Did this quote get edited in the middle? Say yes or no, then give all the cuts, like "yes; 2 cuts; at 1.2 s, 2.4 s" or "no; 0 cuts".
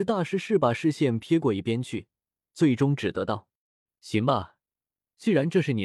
no; 0 cuts